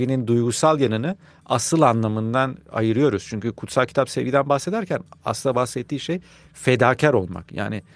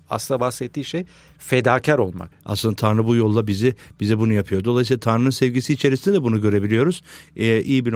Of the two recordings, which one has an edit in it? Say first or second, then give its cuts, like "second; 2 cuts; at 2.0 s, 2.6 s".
second; 1 cut; at 2.3 s